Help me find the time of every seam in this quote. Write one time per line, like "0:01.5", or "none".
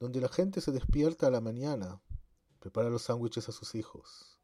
none